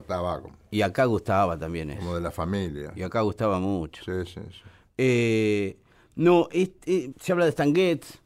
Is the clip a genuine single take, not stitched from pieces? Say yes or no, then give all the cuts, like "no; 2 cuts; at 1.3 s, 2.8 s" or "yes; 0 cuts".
no; 1 cut; at 7.1 s